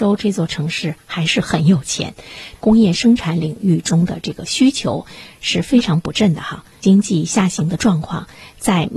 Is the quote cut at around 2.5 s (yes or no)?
yes